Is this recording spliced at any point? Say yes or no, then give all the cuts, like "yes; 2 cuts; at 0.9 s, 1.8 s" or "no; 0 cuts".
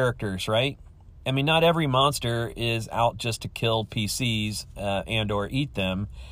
no; 0 cuts